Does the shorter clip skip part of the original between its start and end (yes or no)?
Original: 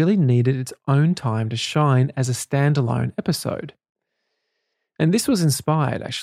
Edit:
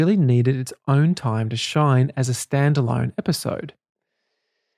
no